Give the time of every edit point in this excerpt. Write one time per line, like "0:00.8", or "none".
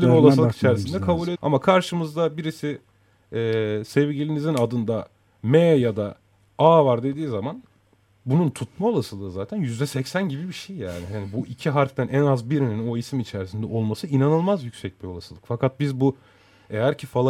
0:01.4

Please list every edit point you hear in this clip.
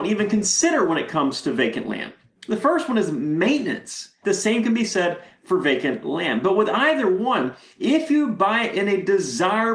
0:04.2

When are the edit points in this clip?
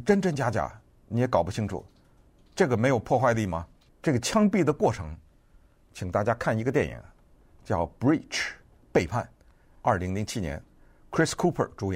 0:03.9

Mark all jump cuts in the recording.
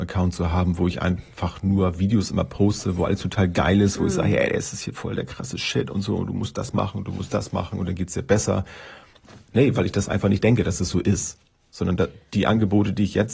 none

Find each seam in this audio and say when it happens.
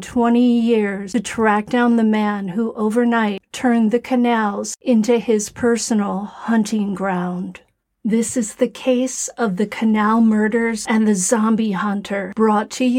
none

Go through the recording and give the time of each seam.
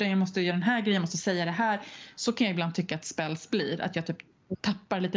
none

